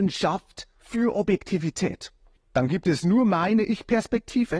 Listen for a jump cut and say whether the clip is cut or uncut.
cut